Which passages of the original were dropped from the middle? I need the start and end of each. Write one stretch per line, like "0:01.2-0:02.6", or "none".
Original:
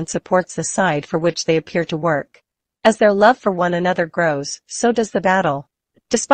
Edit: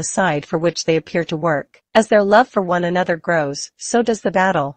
0:02.5-0:02.8